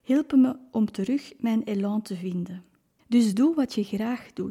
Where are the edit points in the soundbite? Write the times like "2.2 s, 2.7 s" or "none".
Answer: 3.0 s